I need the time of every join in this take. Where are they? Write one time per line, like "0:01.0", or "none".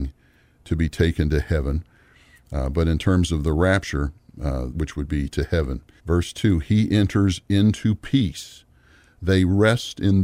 0:04.7
0:06.0